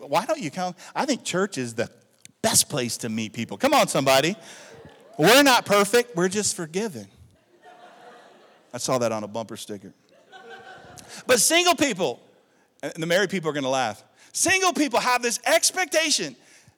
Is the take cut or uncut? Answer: uncut